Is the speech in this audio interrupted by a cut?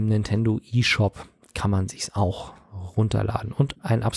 no; 0 cuts

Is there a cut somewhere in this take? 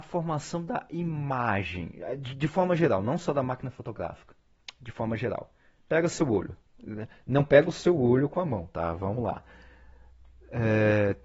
no; 0 cuts

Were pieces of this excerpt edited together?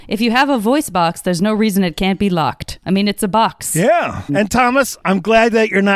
yes; 1 cut; at 4.3 s

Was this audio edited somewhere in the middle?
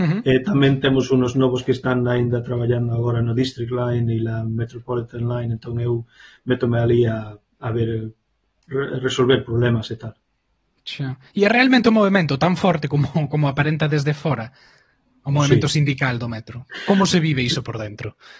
no; 0 cuts

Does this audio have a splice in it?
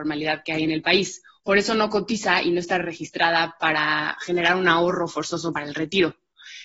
yes; 1 cut; at 1.3 s

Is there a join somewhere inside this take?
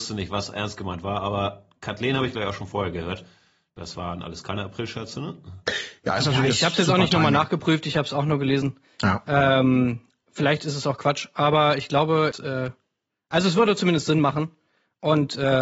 yes; 1 cut; at 12.3 s

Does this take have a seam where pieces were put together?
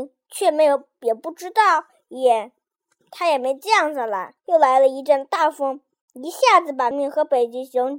yes; 2 cuts; at 4.4 s, 6.9 s

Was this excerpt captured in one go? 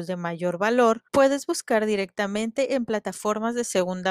no; 1 cut; at 1.1 s

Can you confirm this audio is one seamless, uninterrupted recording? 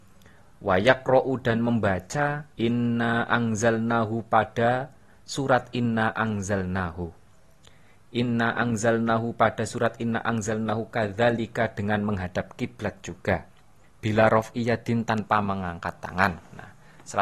no; 2 cuts; at 2.5 s, 13.8 s

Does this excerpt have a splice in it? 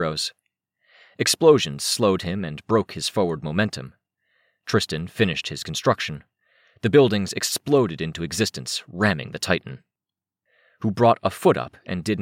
no; 0 cuts

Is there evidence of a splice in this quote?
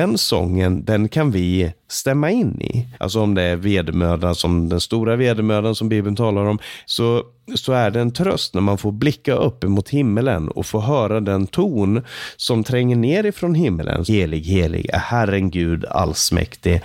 yes; 3 cuts; at 2.9 s, 6.9 s, 14.1 s

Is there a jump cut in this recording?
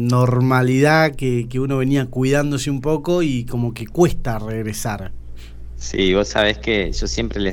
no; 0 cuts

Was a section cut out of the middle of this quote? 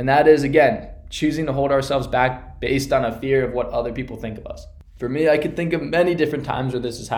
no; 0 cuts

